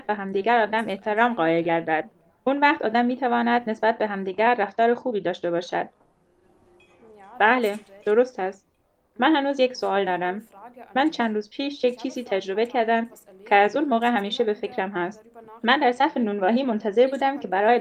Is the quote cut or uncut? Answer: uncut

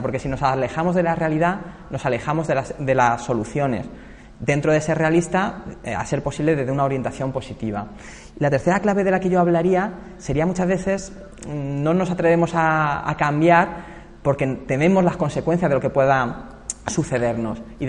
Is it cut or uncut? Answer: uncut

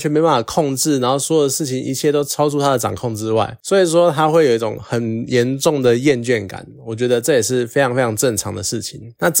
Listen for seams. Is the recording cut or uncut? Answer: uncut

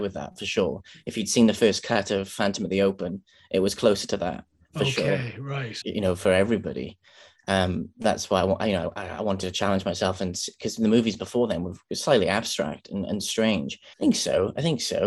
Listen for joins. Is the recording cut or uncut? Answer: cut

